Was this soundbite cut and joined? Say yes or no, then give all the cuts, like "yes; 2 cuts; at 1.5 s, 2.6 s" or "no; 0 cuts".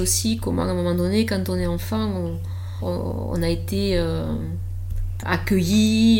yes; 2 cuts; at 2.8 s, 5.2 s